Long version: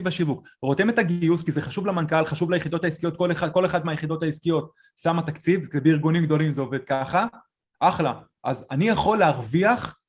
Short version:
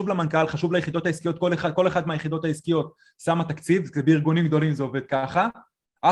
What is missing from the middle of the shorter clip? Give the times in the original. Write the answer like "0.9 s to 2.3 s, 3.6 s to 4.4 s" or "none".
none